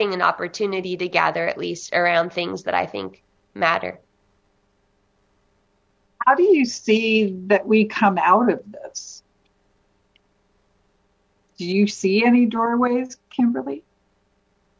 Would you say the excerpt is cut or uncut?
uncut